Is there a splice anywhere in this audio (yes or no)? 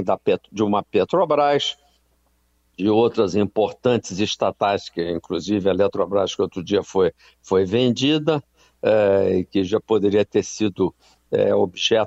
no